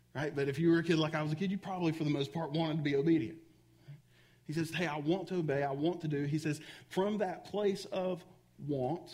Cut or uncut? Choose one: cut